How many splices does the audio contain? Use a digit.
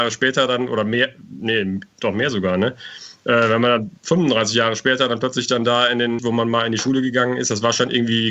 2